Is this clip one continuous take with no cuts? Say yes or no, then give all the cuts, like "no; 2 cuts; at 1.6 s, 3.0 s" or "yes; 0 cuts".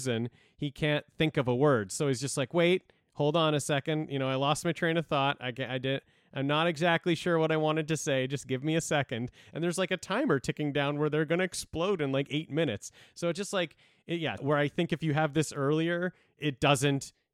no; 2 cuts; at 14.4 s, 16.4 s